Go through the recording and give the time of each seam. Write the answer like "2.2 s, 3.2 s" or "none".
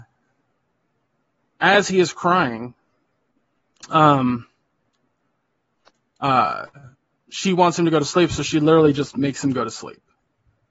none